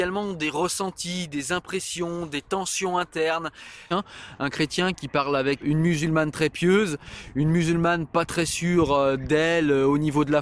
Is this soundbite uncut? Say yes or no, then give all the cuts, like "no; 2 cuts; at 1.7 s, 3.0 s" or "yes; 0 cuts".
no; 2 cuts; at 3.9 s, 5.6 s